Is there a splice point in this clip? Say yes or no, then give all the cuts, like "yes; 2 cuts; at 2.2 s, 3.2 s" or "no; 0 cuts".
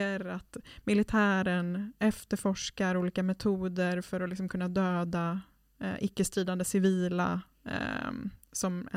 no; 0 cuts